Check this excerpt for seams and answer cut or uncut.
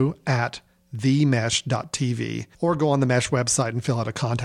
cut